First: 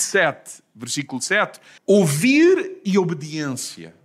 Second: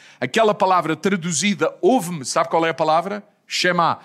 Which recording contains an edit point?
first; 1 cut; at 1.8 s

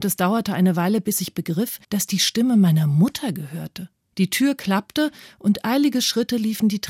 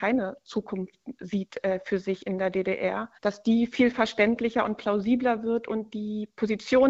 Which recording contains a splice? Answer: first; 1 cut; at 1.8 s

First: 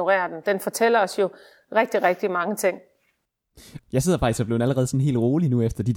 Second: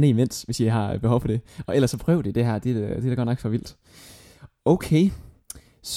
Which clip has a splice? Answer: first; 1 cut; at 3.8 s

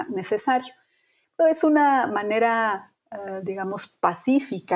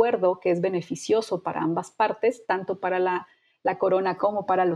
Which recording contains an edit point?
first; 1 cut; at 1.2 s

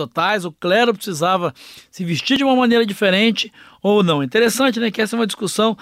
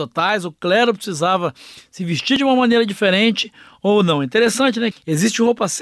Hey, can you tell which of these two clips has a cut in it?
second; 1 cut; at 4.9 s

